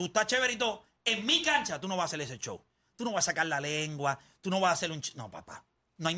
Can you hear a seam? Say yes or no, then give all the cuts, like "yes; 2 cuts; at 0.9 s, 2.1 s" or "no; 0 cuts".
no; 0 cuts